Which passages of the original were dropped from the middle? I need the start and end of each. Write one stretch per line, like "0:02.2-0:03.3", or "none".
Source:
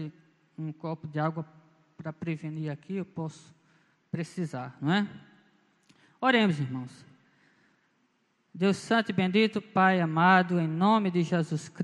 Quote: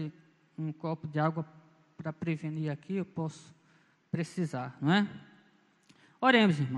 none